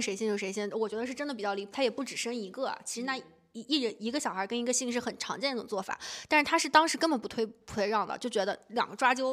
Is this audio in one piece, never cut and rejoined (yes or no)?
no